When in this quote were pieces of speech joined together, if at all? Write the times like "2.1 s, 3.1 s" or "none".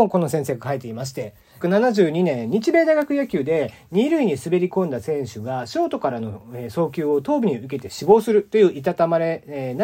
1.6 s